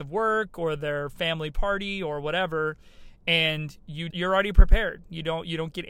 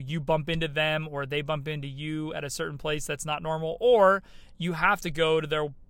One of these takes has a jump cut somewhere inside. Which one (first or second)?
first